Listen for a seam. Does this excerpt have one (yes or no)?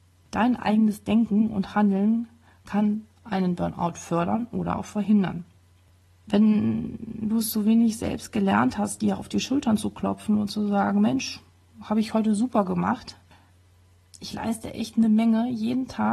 no